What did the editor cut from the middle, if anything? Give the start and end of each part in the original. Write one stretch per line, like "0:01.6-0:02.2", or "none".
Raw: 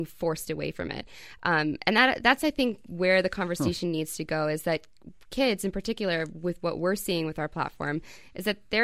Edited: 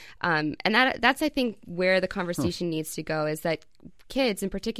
none